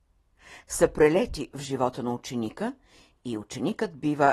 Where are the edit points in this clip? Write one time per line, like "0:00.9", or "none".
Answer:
none